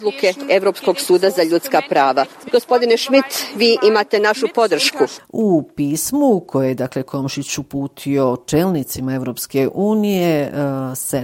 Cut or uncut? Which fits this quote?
cut